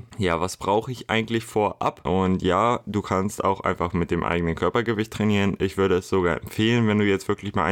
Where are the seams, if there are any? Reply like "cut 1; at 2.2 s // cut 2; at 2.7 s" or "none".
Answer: cut 1; at 2.1 s

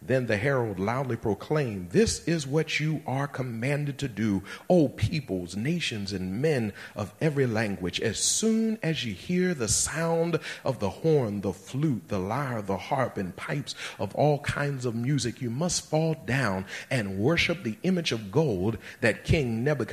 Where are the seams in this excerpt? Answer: none

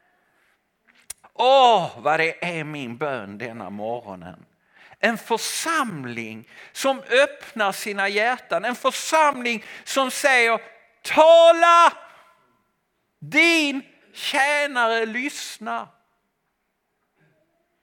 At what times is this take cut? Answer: cut 1; at 1.2 s

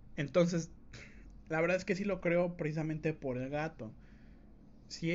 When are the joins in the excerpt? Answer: none

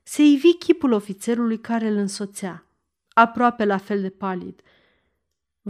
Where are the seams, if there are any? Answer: none

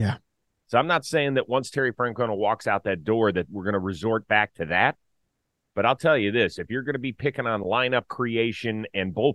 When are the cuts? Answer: none

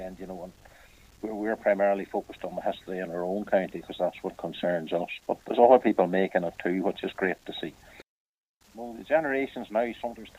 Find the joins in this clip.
cut 1; at 8.6 s

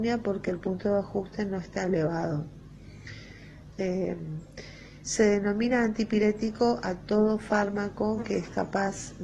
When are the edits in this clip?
cut 1; at 3.7 s

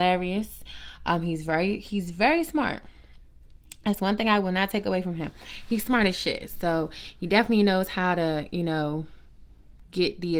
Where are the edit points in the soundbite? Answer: none

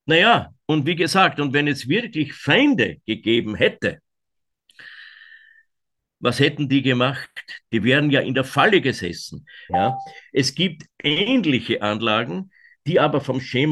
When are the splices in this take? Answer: cut 1; at 7.6 s // cut 2; at 9.7 s

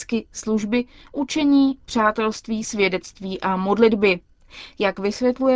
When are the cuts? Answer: none

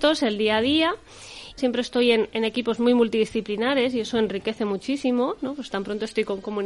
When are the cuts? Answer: cut 1; at 1.6 s

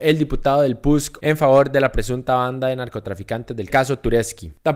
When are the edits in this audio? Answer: cut 1; at 1.2 s

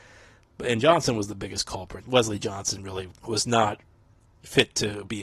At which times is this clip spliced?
cut 1; at 2.0 s // cut 2; at 3.2 s

